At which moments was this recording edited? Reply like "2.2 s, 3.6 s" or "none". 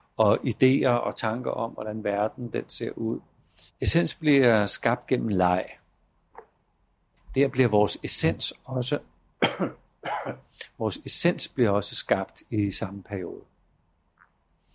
3.7 s, 7.2 s